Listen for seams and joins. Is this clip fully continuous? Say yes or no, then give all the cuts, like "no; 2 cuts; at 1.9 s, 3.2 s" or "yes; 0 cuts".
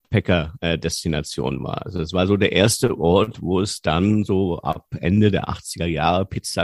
yes; 0 cuts